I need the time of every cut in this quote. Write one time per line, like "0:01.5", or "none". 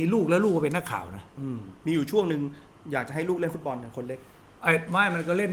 0:01.8